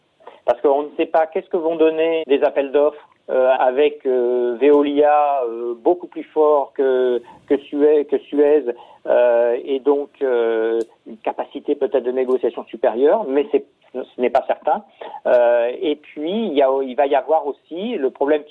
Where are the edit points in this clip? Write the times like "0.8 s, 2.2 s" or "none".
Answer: 2.2 s, 3.6 s